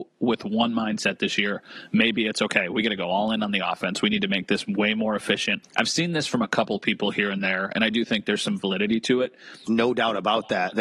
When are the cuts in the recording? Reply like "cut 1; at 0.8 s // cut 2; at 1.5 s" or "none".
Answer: cut 1; at 5.6 s // cut 2; at 9.7 s